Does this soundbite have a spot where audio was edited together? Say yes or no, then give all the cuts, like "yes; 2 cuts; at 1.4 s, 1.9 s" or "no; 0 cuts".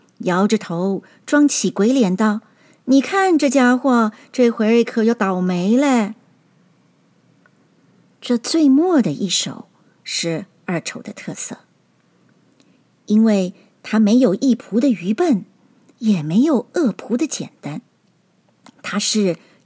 no; 0 cuts